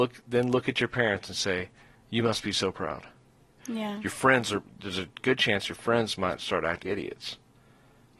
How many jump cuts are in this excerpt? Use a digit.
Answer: 2